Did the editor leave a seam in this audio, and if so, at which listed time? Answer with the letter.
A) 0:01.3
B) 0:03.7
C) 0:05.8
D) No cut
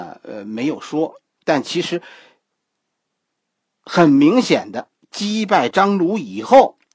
D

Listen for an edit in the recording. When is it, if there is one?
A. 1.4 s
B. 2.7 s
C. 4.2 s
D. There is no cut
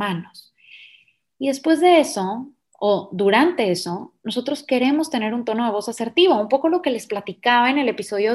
D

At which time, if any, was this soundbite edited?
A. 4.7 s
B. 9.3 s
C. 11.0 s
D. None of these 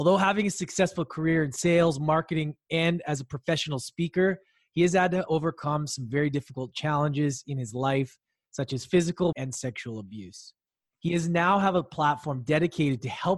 B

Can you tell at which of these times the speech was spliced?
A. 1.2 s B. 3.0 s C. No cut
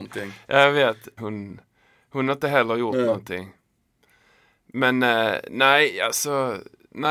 A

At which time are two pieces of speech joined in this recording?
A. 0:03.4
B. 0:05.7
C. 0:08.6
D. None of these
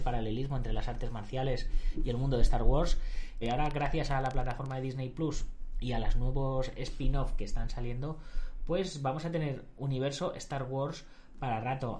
A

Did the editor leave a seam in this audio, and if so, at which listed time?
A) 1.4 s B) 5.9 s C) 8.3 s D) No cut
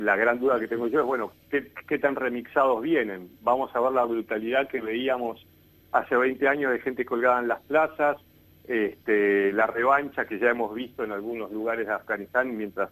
D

